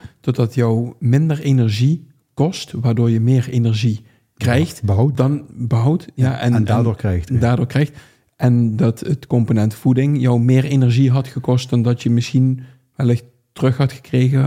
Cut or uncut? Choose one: uncut